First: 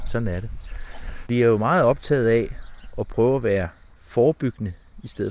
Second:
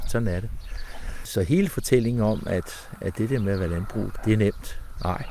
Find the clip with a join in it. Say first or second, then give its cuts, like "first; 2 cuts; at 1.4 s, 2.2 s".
first; 1 cut; at 1.2 s